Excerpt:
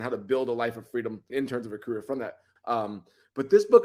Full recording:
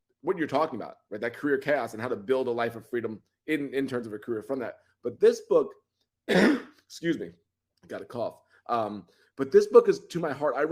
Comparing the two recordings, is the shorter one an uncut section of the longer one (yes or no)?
no